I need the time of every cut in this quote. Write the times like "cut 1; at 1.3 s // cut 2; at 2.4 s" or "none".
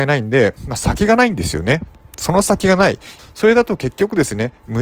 cut 1; at 3.2 s